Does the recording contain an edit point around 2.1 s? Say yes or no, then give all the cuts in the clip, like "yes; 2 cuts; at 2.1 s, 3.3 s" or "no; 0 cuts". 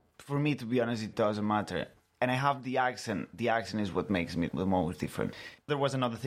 no; 0 cuts